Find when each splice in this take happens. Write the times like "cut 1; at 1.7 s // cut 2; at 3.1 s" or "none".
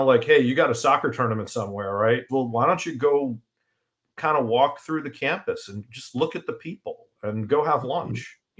cut 1; at 2.3 s